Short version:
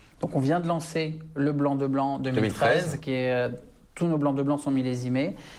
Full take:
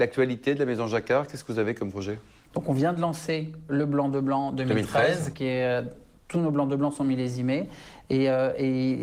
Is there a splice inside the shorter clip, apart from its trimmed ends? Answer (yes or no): no